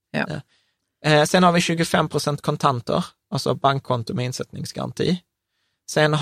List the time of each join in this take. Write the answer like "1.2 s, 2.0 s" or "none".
none